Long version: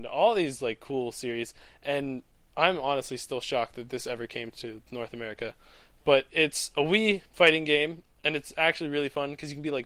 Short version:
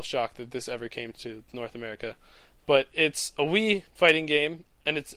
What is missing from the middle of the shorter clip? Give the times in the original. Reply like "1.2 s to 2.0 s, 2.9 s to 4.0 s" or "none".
none